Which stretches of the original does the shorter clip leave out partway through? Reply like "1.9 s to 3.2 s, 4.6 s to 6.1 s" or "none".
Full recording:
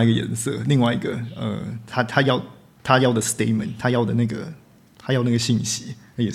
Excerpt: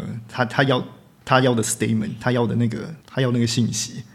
4.6 s to 4.9 s